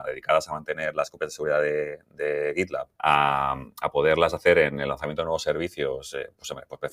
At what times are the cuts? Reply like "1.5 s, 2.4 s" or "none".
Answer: 2.9 s